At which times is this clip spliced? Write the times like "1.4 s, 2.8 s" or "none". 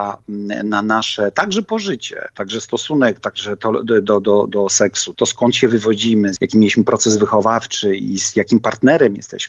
5.1 s, 6.4 s